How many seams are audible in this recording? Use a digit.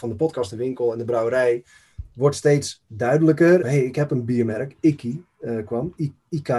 1